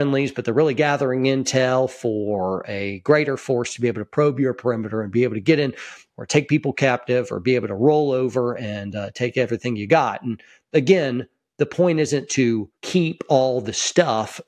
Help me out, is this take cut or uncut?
cut